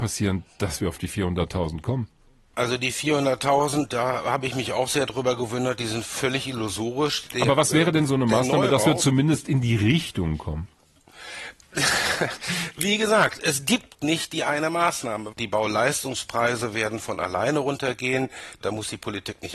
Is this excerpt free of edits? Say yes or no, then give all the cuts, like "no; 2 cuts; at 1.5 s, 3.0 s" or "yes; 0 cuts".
no; 2 cuts; at 7.3 s, 15.3 s